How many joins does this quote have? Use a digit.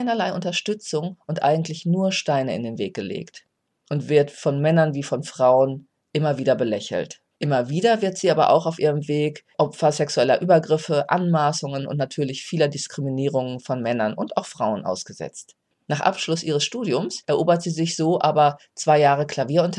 2